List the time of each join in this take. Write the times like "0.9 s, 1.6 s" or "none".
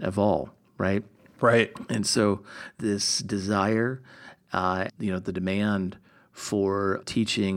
4.9 s